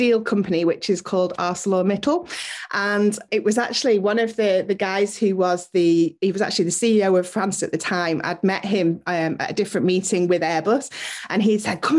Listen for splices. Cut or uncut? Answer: uncut